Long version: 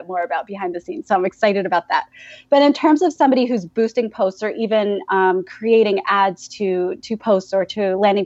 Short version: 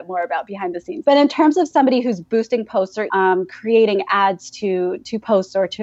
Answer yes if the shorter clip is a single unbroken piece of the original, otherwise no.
no